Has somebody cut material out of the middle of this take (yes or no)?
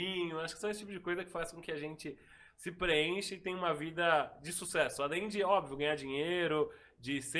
no